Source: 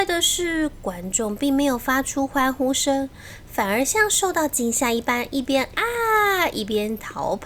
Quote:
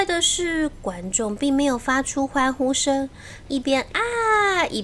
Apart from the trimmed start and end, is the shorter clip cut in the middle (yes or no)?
yes